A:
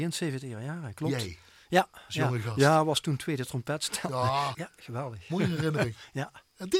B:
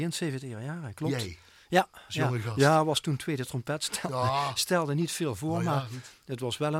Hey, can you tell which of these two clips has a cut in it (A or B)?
A